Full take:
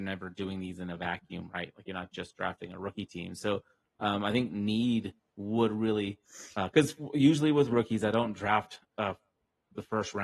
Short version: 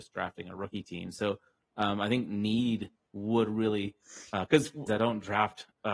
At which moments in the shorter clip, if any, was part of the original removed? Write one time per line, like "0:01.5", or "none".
0:04.9